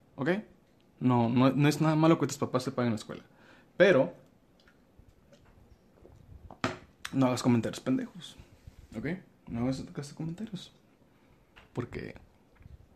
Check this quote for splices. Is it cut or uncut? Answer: uncut